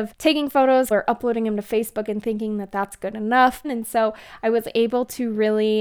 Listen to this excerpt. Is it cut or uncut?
cut